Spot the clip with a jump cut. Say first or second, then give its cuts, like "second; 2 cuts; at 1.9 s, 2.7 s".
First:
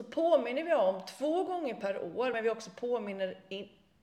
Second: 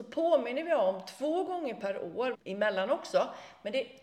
second; 1 cut; at 2.3 s